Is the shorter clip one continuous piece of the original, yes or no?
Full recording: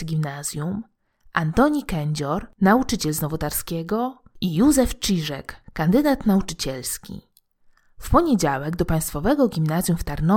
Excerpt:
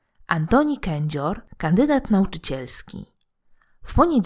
no